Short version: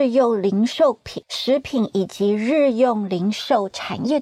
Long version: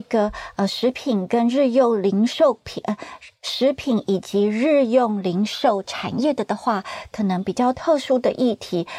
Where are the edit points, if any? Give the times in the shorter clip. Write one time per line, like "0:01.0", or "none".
0:01.2